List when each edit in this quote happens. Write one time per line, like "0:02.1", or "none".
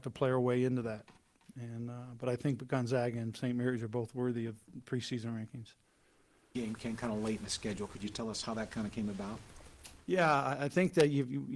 0:06.5